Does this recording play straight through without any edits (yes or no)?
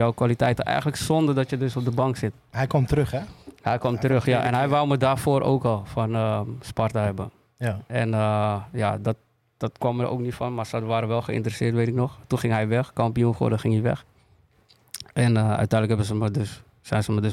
yes